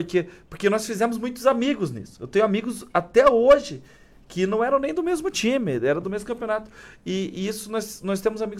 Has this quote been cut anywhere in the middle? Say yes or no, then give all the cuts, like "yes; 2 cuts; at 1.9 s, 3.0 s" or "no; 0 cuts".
no; 0 cuts